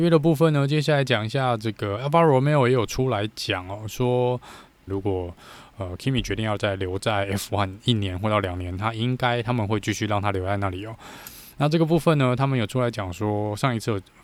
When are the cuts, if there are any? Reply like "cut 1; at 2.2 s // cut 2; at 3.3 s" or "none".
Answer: cut 1; at 4.9 s